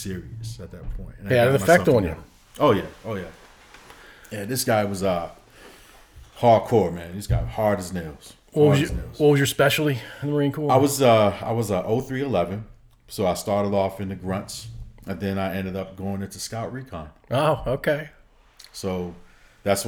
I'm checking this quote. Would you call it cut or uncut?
uncut